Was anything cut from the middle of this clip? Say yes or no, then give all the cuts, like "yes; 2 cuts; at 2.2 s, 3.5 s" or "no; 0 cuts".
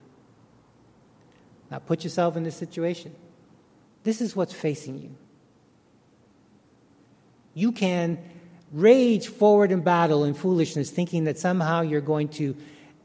yes; 1 cut; at 3.9 s